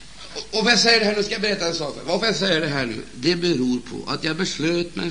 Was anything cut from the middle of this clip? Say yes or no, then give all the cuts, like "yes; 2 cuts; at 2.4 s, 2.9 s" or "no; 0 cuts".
no; 0 cuts